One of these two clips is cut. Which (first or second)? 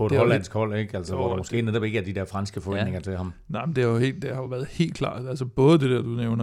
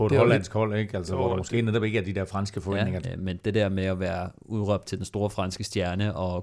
second